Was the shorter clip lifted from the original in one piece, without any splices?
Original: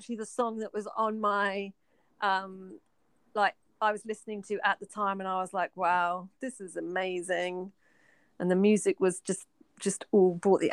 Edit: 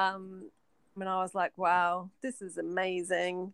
no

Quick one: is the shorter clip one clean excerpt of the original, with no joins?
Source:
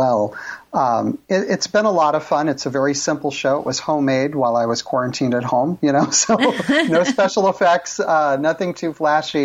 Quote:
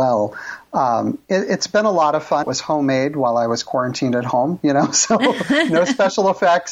no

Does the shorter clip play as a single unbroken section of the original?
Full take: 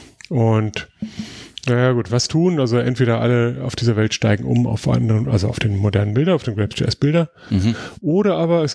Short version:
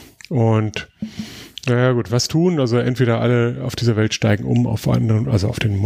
yes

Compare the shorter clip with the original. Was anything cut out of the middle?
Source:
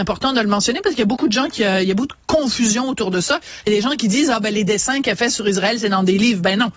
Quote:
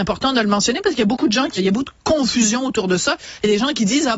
yes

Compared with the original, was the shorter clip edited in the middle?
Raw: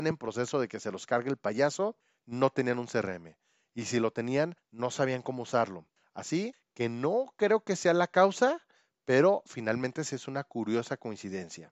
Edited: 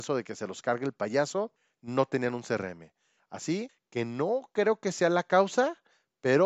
yes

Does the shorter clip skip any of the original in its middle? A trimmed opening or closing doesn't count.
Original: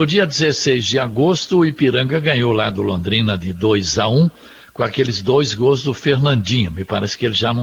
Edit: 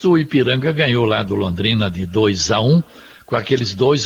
no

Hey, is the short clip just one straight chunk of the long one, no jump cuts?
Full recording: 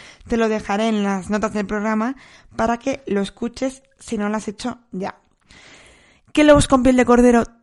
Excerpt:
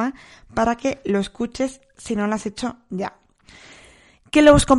yes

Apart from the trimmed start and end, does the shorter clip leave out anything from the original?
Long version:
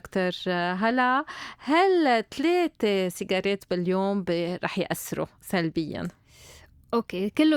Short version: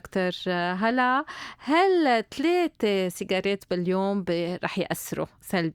no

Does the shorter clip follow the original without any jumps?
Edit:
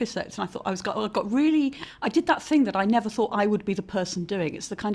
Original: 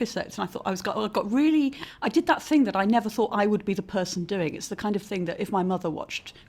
yes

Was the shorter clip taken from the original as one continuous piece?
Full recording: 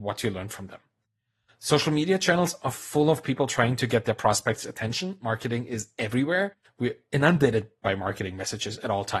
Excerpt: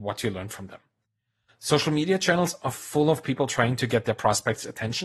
yes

